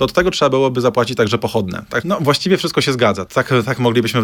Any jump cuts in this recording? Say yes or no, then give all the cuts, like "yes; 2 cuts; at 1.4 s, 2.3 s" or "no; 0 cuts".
yes; 2 cuts; at 2.0 s, 3.3 s